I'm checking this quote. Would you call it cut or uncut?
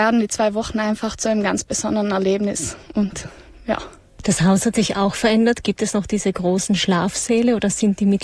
uncut